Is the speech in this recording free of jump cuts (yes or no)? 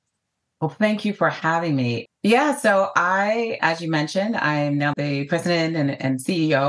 no